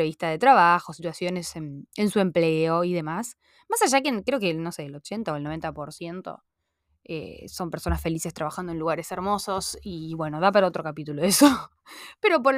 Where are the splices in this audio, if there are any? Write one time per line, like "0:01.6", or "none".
none